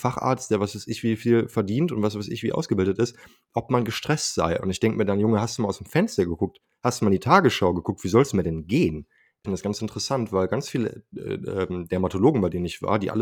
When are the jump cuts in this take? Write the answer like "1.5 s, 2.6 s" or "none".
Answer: 9.4 s